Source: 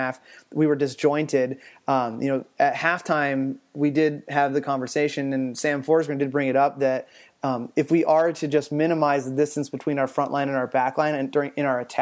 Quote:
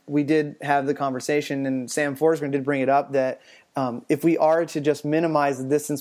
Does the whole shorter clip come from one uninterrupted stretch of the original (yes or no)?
yes